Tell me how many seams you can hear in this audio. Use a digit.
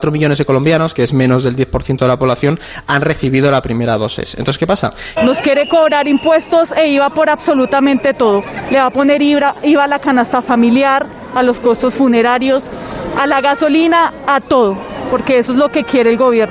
1